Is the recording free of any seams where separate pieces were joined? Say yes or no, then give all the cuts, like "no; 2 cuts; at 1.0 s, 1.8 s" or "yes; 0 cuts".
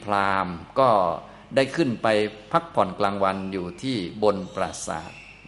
yes; 0 cuts